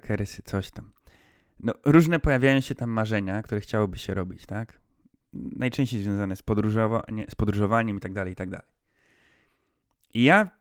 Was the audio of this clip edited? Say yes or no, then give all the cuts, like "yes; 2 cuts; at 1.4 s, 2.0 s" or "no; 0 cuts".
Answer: no; 0 cuts